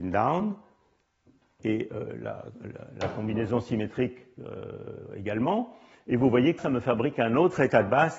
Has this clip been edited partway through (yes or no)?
yes